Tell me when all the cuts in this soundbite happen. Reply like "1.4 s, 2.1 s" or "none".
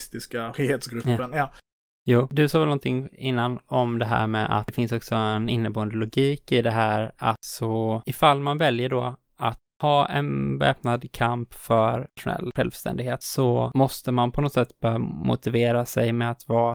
none